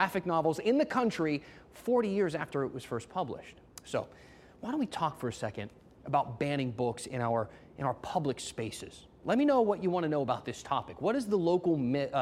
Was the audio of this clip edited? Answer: no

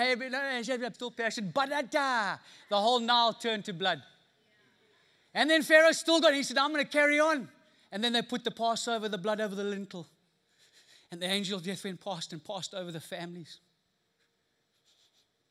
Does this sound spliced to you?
yes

